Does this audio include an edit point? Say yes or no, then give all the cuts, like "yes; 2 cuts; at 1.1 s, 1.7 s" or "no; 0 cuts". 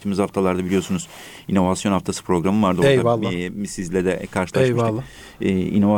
no; 0 cuts